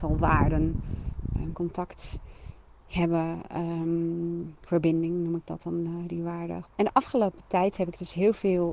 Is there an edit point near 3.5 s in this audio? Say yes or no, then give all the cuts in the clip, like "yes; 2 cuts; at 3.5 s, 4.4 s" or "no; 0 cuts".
no; 2 cuts; at 1.5 s, 6.6 s